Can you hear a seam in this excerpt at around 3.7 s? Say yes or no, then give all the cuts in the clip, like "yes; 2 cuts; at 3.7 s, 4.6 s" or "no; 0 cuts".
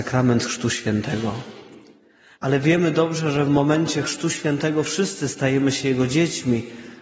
no; 1 cut; at 2.3 s